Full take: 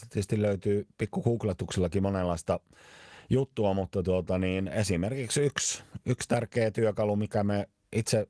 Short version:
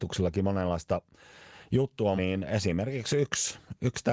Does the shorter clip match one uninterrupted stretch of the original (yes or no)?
no